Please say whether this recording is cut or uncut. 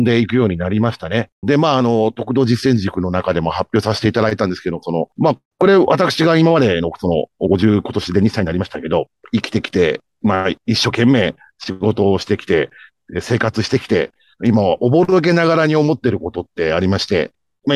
cut